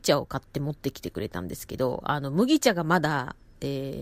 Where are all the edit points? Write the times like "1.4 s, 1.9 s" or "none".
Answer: none